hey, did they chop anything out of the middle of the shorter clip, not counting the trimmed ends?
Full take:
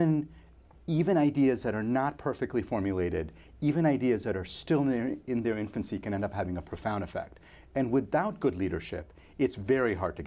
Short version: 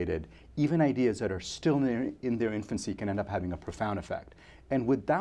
no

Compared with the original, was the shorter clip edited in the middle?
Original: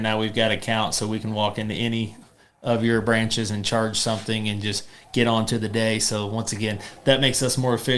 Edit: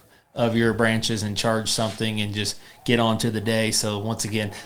no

